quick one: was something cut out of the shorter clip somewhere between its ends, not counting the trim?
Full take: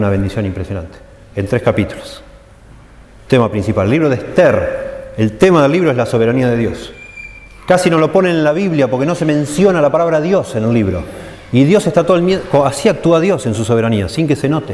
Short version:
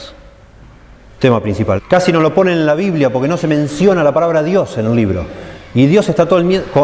yes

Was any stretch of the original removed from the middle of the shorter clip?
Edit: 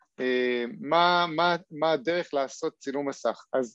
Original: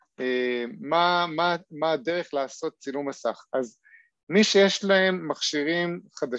no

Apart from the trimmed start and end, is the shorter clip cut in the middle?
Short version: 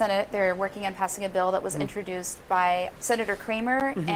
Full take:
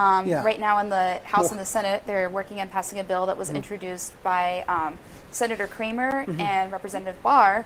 yes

